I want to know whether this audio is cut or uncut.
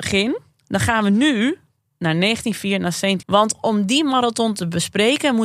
cut